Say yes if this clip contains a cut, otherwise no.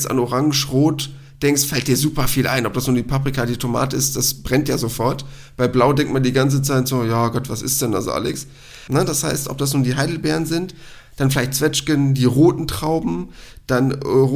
yes